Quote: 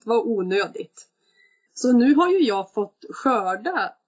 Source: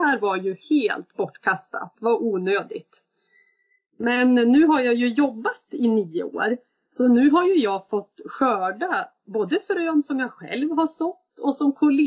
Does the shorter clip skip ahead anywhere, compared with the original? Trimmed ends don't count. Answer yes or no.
yes